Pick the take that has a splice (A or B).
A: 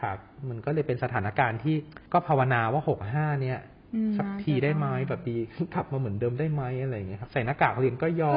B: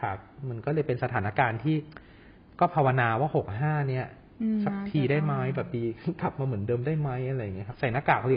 A